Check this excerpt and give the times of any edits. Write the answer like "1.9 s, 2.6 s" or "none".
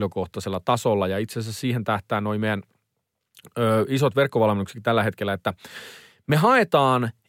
none